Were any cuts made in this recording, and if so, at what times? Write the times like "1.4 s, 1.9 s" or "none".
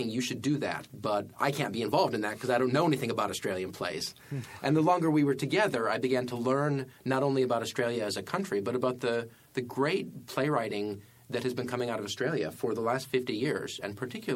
none